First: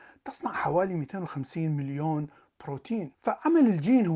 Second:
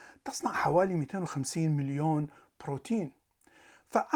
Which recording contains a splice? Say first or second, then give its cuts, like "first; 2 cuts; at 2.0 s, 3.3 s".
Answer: first; 1 cut; at 3.1 s